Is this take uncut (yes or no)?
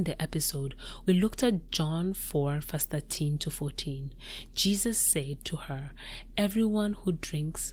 yes